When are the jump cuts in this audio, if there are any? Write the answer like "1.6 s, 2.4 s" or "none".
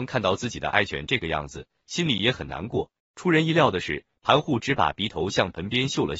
3.0 s